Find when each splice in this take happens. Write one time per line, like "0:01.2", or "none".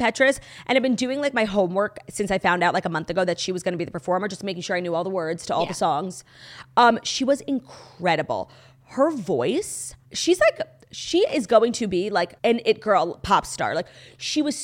0:10.0
0:12.4